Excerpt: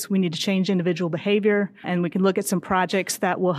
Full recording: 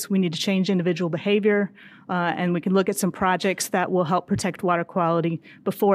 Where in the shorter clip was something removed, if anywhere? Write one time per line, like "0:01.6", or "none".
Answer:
0:01.8